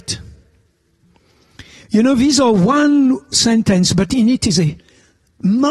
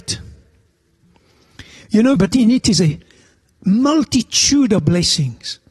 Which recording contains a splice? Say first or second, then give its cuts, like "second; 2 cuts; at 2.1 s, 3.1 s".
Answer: second; 1 cut; at 2.2 s